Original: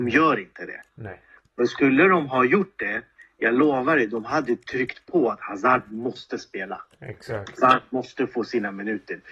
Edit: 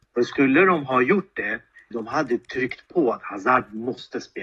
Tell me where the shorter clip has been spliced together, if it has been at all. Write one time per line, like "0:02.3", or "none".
0:01.9